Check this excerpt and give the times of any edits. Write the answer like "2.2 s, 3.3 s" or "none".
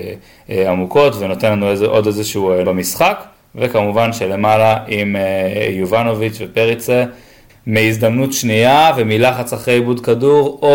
2.6 s, 7.5 s